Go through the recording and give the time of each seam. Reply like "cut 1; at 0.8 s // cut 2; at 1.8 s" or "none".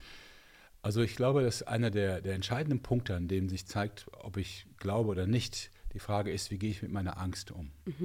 none